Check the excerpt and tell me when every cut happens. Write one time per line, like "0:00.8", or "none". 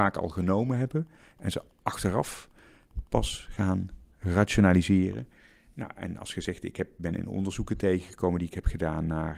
0:04.1